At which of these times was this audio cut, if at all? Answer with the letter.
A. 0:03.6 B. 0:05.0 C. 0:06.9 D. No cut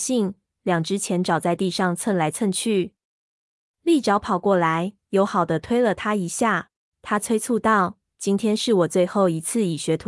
C